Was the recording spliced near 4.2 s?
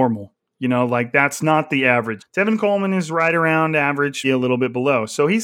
yes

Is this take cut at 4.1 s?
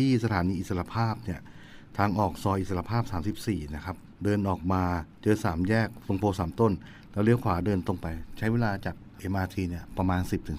yes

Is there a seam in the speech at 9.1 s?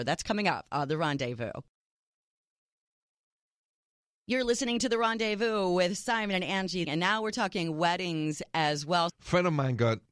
yes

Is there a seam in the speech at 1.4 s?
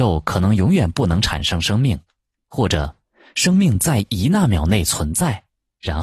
no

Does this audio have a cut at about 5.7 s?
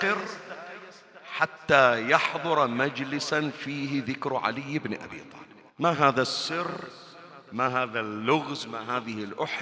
yes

